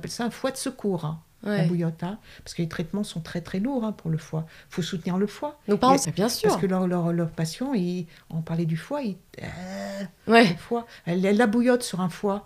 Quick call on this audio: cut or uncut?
cut